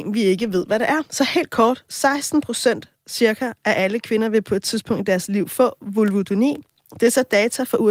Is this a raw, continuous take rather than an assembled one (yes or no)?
yes